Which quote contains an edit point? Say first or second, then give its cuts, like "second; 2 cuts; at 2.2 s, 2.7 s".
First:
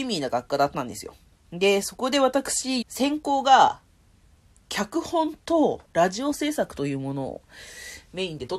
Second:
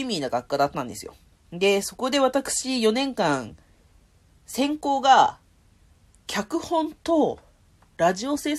first; 2 cuts; at 2.8 s, 5.8 s